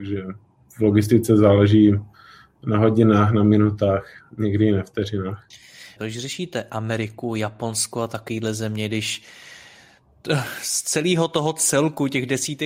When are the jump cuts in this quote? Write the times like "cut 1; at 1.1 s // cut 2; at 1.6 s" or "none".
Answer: cut 1; at 6.0 s